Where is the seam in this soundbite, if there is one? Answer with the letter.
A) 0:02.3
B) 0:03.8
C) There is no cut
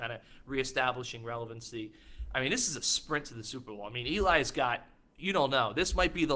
C